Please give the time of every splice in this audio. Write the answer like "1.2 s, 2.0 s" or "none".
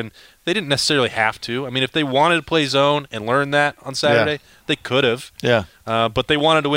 none